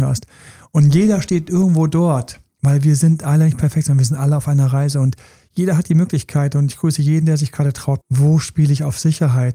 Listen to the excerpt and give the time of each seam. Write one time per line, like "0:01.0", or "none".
0:08.0